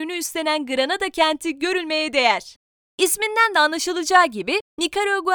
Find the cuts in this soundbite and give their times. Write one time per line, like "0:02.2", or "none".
0:02.8

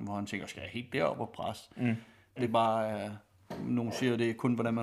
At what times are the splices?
0:02.4

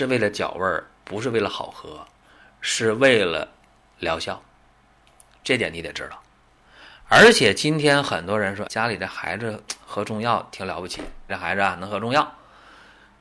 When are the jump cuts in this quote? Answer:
0:08.7
0:11.3

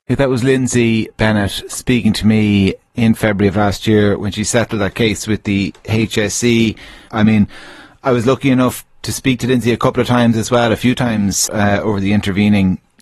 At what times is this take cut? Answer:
0:07.1
0:11.5

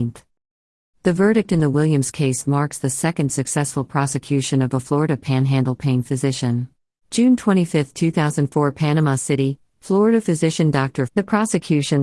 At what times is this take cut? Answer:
0:07.0
0:11.1

